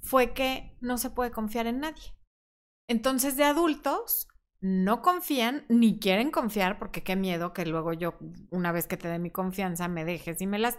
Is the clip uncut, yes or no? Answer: yes